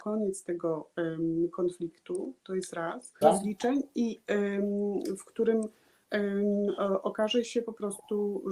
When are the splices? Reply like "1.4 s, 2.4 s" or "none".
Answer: 3.2 s